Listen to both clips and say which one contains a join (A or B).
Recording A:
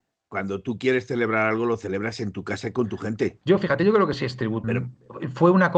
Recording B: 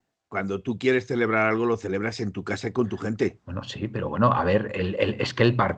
A